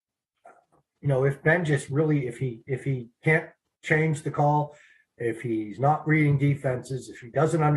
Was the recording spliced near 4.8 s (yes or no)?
no